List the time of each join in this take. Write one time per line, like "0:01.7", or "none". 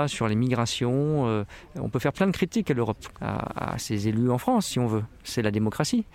0:03.1